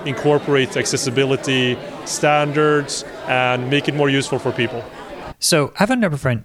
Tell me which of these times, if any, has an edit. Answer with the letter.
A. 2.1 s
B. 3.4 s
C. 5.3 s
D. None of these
C